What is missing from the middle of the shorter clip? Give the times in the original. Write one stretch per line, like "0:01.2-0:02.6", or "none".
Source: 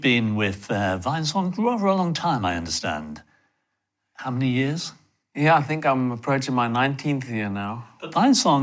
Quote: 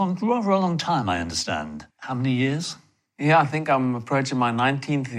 0:03.3-0:04.1